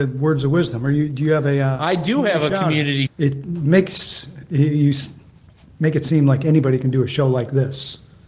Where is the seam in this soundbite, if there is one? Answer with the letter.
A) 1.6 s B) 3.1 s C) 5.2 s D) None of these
B